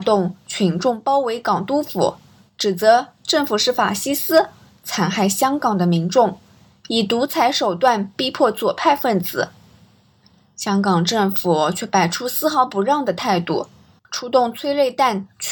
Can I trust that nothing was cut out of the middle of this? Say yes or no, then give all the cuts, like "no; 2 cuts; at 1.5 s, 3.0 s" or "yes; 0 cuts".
no; 1 cut; at 14.0 s